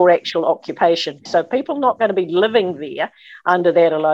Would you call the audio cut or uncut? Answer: cut